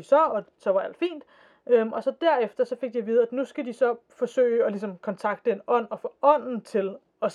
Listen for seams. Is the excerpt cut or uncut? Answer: uncut